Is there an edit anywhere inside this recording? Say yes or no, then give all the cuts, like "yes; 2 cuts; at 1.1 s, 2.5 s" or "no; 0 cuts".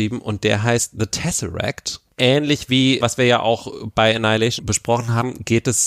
yes; 2 cuts; at 3.0 s, 4.6 s